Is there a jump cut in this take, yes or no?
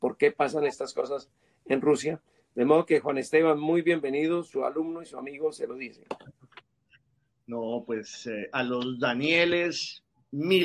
no